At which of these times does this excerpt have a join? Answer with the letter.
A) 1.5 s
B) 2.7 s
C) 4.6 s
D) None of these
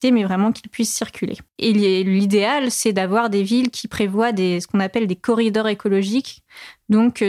A